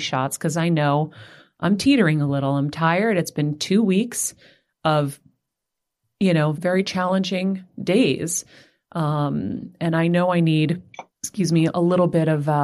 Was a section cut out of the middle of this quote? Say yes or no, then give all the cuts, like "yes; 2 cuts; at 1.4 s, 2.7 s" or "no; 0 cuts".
yes; 2 cuts; at 6.5 s, 11.1 s